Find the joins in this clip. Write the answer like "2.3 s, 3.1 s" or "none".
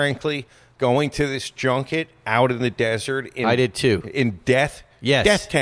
none

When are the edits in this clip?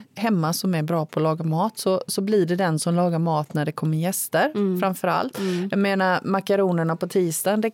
none

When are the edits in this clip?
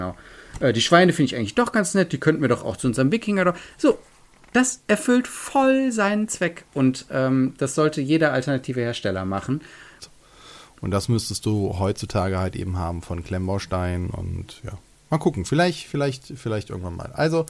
10.0 s

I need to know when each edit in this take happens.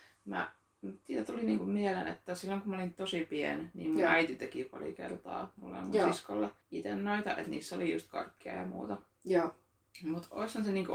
6.6 s

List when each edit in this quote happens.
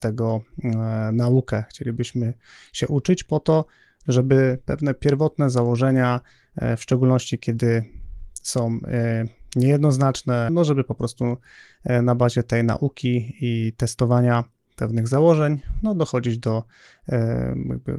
10.5 s

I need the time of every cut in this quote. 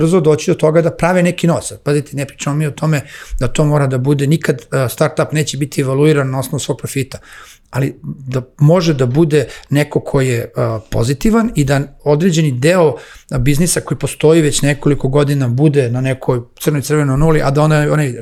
none

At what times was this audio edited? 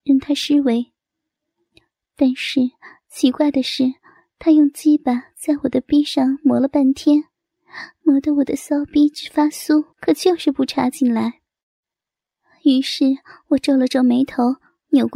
9.9 s

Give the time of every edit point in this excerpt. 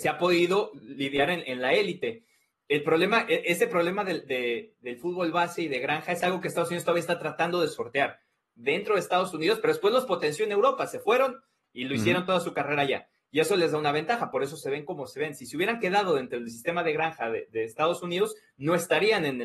8.4 s

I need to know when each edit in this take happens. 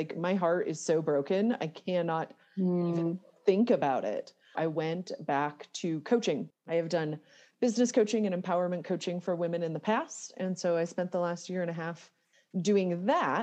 4.5 s, 6.5 s

